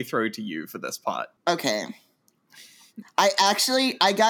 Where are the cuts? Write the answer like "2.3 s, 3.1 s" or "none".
1.4 s